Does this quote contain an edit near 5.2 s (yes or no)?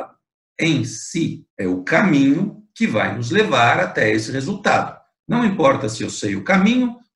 no